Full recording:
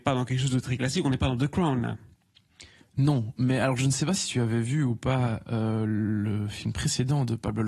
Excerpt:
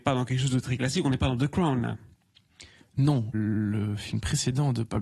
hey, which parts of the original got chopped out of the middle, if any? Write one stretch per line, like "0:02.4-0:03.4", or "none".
0:03.3-0:05.9